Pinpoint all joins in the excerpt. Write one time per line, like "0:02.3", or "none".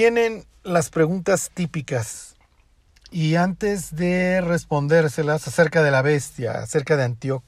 none